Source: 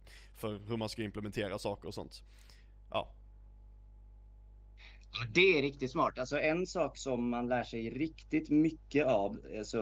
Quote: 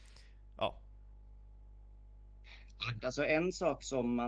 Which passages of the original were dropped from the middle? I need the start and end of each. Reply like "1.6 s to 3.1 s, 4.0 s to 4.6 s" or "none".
5.3 s to 6.1 s

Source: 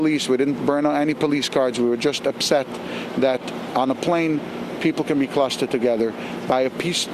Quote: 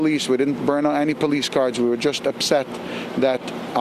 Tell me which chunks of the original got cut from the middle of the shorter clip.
none

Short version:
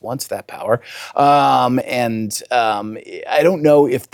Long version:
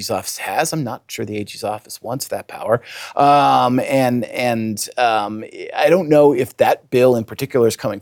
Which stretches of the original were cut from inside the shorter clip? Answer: 3.8 s to 4.3 s

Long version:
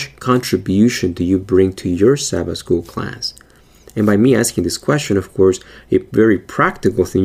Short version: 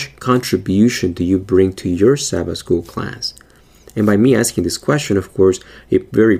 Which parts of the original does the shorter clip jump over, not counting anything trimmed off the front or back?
none

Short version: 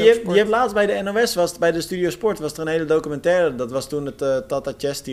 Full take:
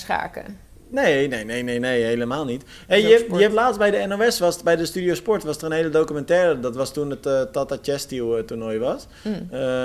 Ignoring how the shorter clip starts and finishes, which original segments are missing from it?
none

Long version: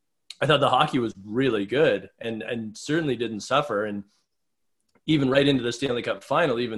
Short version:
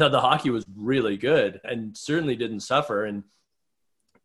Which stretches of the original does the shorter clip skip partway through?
2.1 s to 2.4 s

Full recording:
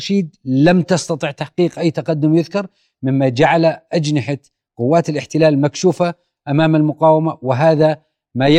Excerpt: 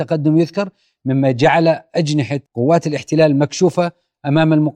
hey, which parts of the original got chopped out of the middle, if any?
4.4 s to 4.7 s

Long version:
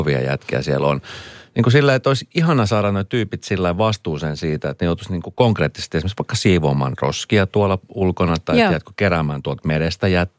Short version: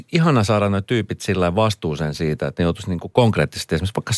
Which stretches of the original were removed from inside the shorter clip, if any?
none

